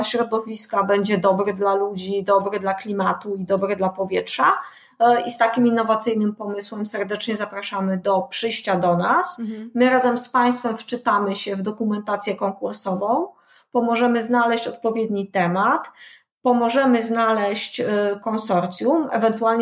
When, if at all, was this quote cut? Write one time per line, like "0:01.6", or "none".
none